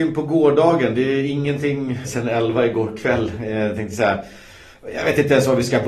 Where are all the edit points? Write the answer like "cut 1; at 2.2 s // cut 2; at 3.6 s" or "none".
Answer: cut 1; at 2.0 s